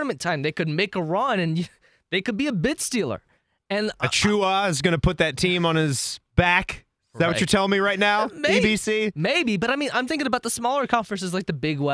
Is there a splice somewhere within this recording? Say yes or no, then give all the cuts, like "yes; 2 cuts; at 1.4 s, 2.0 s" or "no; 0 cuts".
yes; 1 cut; at 10.1 s